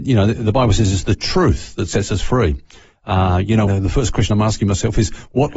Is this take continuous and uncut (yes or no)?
no